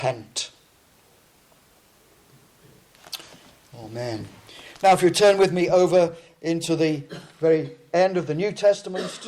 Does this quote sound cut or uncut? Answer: uncut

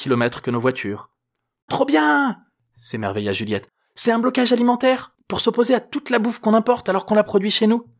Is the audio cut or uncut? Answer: cut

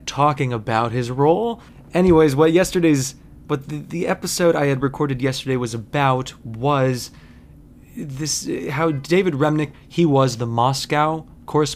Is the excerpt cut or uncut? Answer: cut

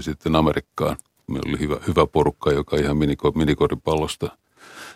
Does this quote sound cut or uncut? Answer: cut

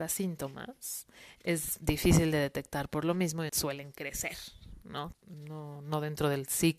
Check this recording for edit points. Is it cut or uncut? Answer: cut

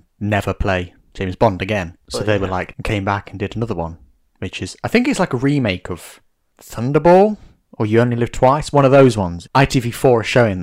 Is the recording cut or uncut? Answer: cut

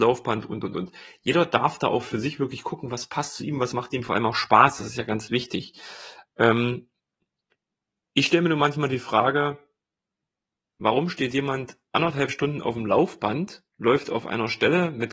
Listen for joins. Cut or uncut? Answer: cut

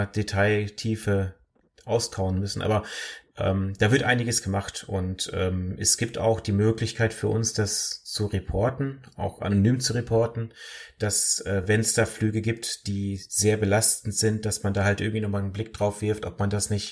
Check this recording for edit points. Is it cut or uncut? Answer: uncut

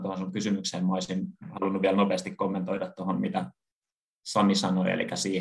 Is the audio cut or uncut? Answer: uncut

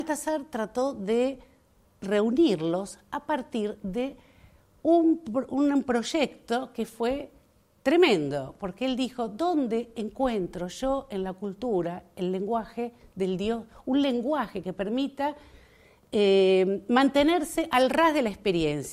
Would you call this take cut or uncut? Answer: uncut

